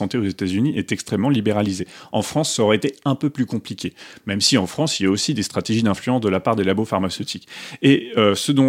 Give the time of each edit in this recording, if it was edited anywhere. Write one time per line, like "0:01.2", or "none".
none